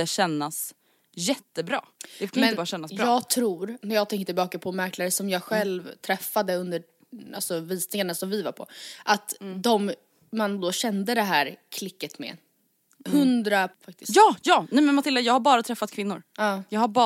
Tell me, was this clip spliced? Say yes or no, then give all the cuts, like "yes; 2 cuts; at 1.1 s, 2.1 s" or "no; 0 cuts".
yes; 2 cuts; at 3.8 s, 13.7 s